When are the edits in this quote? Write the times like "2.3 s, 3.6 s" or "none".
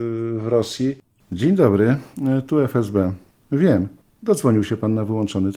4.0 s